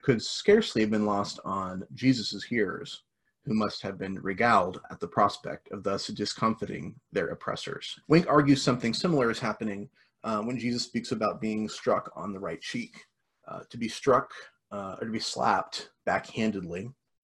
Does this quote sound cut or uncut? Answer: cut